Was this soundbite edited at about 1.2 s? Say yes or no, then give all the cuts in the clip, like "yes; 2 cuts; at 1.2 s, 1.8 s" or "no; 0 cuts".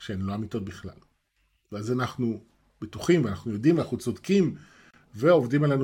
no; 0 cuts